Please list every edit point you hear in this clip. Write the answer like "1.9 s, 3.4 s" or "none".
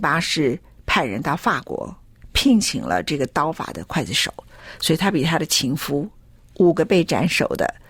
none